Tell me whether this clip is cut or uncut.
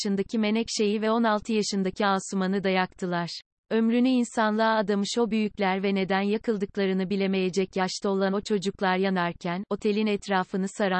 cut